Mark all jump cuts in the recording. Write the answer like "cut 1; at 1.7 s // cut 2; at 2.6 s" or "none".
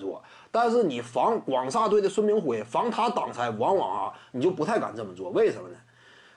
none